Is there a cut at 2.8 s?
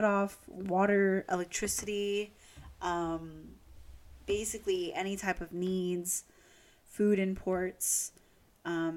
no; 0 cuts

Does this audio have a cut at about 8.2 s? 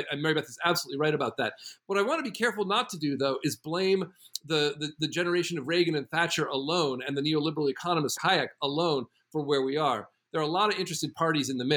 yes; 1 cut; at 8.2 s

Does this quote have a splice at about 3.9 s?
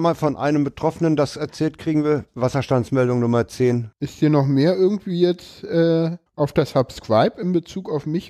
yes; 2 cuts; at 3.9 s, 6.3 s

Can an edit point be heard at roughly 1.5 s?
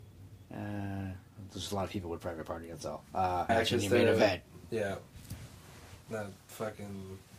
no; 2 cuts; at 3.5 s, 6.1 s

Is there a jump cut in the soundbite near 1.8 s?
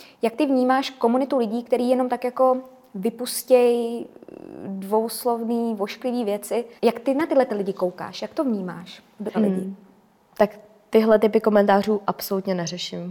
no; 2 cuts; at 6.8 s, 9.3 s

